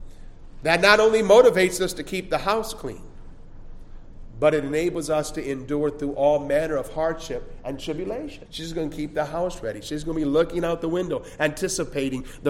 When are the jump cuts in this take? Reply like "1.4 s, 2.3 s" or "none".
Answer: 8.5 s